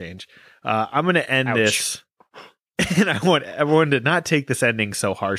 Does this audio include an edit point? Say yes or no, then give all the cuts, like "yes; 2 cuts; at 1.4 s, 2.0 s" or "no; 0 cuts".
no; 0 cuts